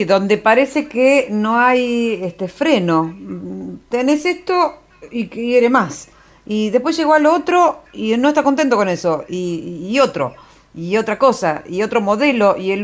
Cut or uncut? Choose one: uncut